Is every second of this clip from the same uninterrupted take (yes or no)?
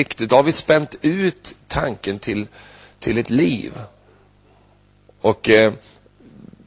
yes